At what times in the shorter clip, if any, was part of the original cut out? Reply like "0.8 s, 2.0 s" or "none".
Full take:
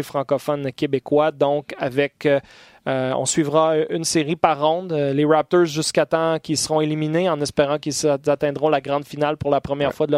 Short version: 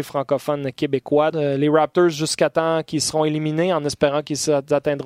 1.3 s